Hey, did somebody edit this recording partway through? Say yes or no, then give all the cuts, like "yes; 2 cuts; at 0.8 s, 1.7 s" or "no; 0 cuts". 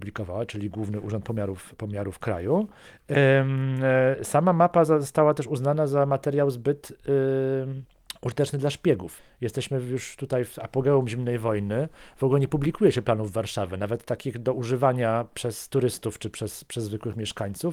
no; 0 cuts